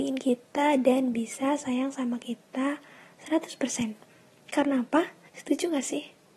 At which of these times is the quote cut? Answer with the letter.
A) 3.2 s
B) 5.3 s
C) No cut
B